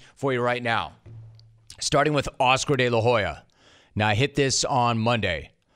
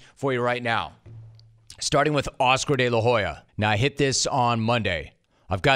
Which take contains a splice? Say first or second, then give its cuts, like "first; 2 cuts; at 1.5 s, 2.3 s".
second; 1 cut; at 3.5 s